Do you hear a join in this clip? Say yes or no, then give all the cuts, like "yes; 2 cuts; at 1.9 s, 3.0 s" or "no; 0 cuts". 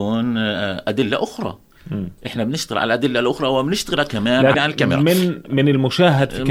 yes; 1 cut; at 4.5 s